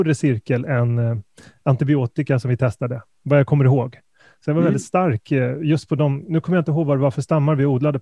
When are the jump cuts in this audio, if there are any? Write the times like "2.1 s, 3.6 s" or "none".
none